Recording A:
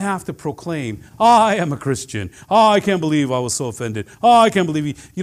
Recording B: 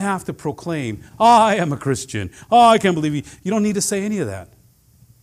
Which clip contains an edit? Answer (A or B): B